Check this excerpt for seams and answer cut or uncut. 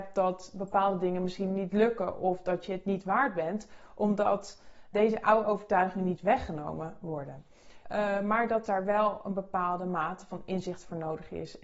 cut